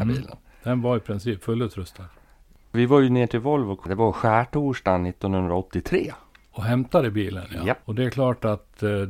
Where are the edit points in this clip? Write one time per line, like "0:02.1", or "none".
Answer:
0:07.8